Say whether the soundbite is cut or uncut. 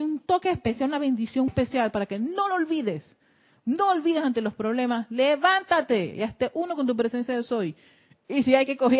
cut